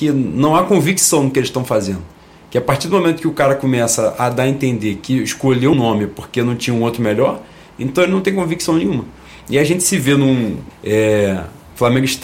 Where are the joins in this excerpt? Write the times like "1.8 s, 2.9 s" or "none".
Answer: 5.7 s, 10.7 s